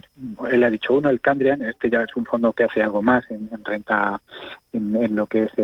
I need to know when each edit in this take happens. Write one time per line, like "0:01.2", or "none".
none